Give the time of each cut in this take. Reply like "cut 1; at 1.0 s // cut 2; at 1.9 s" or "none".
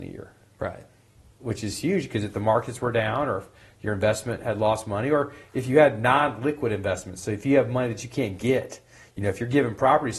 none